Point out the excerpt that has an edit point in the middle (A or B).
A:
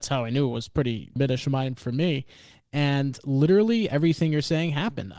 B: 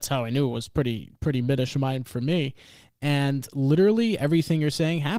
A